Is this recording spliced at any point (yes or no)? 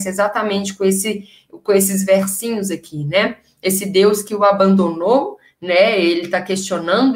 no